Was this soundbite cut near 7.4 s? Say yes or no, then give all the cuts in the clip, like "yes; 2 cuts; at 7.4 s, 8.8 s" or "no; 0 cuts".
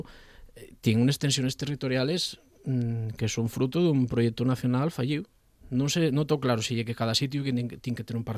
no; 1 cut; at 5.6 s